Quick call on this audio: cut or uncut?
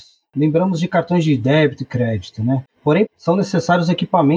cut